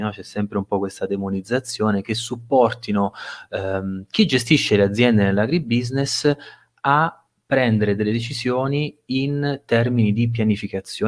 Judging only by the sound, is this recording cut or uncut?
uncut